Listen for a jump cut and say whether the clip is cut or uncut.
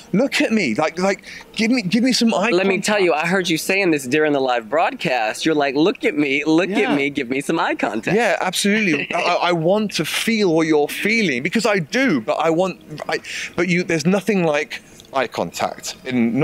uncut